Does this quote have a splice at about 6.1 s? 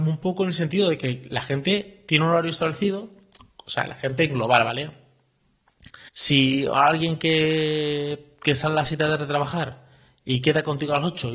yes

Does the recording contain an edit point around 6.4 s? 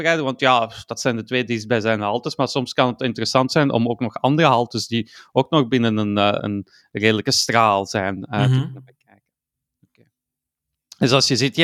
yes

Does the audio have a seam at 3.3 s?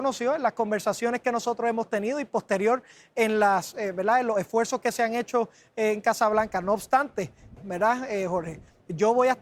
no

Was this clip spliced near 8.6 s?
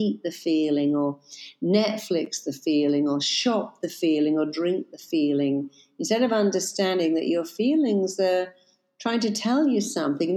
no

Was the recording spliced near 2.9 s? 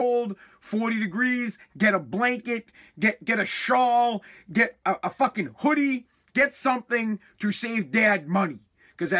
no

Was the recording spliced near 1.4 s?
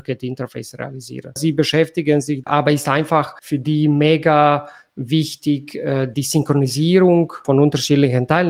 yes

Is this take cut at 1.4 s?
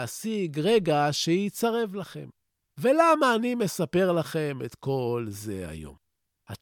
no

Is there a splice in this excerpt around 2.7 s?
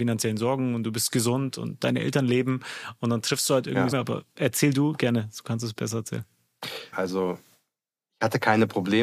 no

